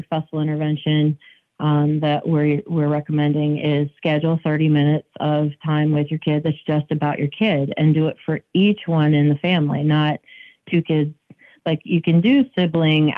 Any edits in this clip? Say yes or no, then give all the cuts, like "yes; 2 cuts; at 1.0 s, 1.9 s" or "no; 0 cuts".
no; 0 cuts